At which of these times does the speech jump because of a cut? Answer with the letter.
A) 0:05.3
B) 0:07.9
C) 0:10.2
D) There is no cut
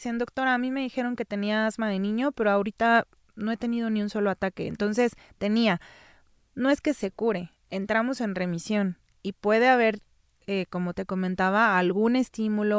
D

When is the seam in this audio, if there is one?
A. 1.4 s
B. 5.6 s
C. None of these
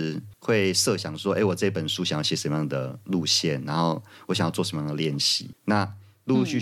C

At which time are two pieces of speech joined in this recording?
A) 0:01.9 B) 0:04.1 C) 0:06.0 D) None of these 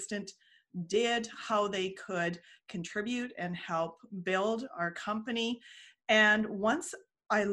D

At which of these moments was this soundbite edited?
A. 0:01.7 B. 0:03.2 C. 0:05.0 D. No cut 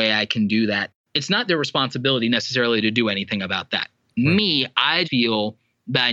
C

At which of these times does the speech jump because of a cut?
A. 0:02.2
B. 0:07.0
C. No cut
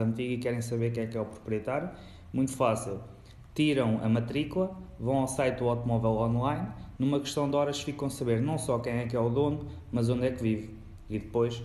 B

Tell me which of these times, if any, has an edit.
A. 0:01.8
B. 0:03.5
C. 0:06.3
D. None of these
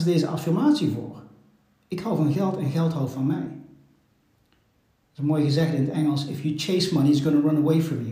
D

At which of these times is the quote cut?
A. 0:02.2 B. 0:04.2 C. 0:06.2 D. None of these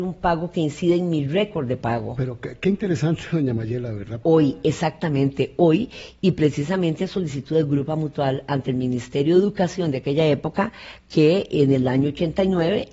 B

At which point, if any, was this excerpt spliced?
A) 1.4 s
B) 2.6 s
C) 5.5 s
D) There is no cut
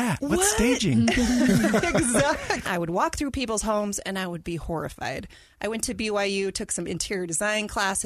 B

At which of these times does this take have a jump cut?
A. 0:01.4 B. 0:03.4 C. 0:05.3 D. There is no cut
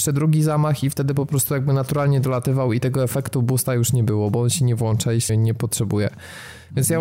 C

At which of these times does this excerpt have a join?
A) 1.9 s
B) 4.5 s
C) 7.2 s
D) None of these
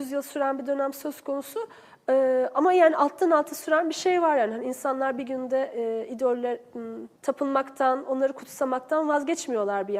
C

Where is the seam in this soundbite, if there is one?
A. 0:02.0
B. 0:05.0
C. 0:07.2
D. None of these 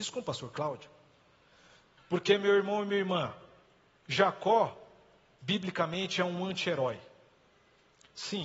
A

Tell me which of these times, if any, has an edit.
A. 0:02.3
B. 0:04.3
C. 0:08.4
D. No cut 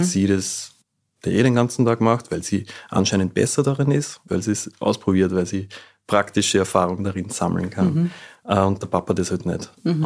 B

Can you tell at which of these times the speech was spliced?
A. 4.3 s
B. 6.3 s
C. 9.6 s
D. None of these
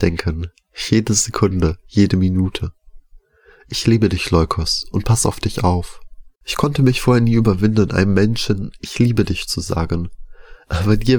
B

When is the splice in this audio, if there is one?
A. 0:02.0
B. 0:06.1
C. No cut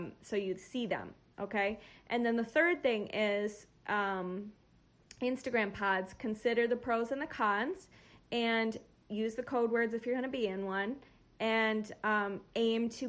C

